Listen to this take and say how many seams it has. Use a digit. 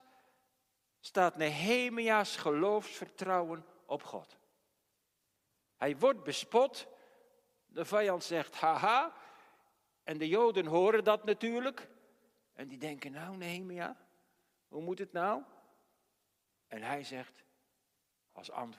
0